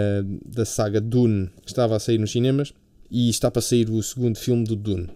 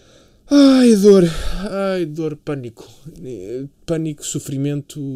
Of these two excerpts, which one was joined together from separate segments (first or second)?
first